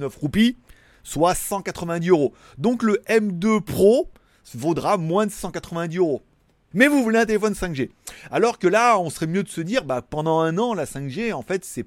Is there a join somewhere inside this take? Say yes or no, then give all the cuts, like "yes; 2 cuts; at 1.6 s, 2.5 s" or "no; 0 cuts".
yes; 1 cut; at 6.7 s